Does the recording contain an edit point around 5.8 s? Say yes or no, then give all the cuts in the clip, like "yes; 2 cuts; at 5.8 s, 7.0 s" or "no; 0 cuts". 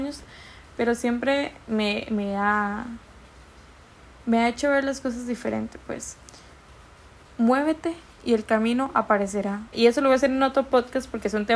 no; 1 cut; at 9.7 s